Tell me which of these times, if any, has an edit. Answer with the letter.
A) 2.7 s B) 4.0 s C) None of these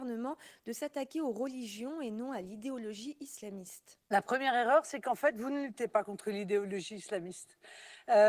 C